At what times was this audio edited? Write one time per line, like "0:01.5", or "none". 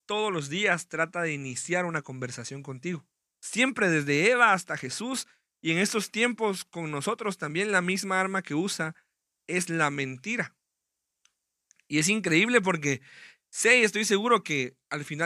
0:03.3